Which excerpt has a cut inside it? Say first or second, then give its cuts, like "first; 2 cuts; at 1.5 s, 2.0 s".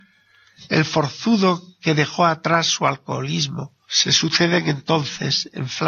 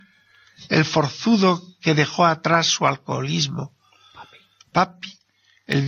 first; 1 cut; at 3.8 s